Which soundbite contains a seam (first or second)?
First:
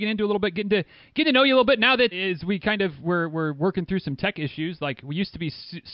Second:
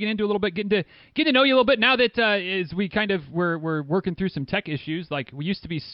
first